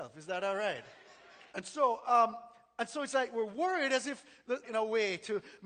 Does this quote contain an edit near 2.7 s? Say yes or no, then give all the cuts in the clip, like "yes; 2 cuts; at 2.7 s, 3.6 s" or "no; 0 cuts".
no; 2 cuts; at 1.5 s, 4.6 s